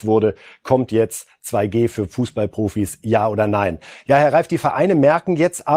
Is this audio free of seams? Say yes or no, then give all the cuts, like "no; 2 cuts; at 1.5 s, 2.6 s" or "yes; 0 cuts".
yes; 0 cuts